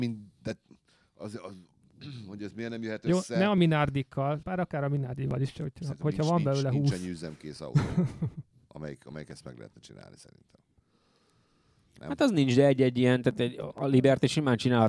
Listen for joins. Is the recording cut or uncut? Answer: cut